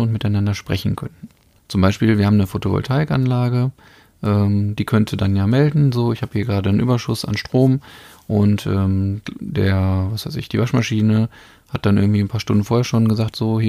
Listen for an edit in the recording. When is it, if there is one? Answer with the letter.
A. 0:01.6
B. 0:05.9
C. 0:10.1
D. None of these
A